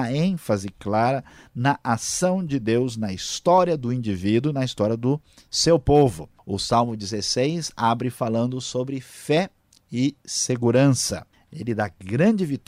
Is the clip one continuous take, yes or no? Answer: no